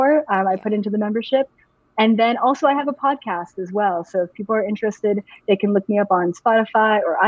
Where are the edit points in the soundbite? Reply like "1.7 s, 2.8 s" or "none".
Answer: none